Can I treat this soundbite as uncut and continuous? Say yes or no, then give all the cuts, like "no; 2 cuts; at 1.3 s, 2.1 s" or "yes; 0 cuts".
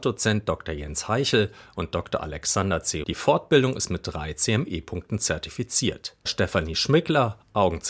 no; 2 cuts; at 3.0 s, 6.3 s